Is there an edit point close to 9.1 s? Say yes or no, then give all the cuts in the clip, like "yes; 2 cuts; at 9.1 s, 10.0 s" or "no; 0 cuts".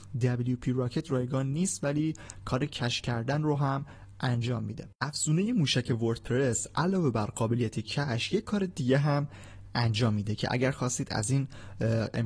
no; 1 cut; at 4.9 s